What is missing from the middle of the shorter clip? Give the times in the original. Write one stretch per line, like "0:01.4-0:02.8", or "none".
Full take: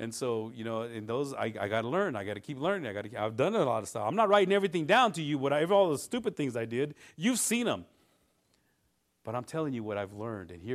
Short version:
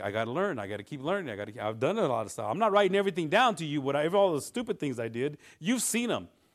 none